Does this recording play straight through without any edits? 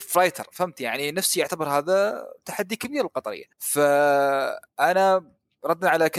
no; 1 cut; at 3.5 s

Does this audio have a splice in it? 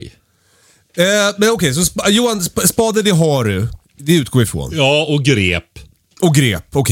no; 0 cuts

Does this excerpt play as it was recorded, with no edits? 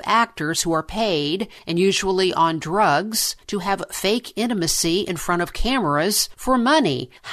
yes; 0 cuts

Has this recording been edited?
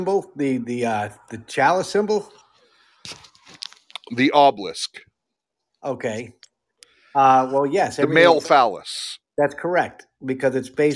no; 0 cuts

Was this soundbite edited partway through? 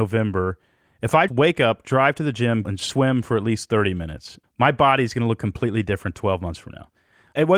yes; 3 cuts; at 1.3 s, 2.6 s, 4.4 s

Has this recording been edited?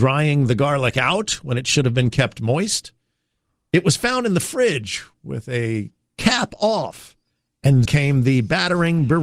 yes; 1 cut; at 7.9 s

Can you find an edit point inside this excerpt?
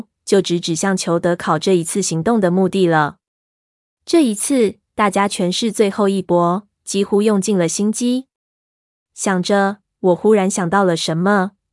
no; 0 cuts

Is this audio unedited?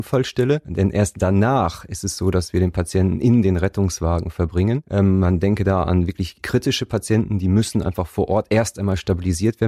yes; 0 cuts

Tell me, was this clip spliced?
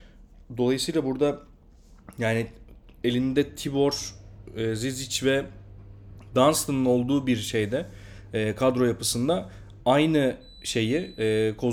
no; 0 cuts

